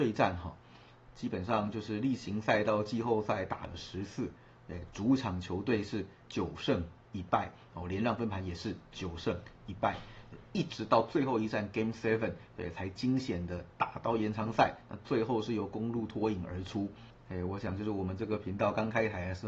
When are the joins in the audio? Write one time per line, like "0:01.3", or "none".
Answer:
none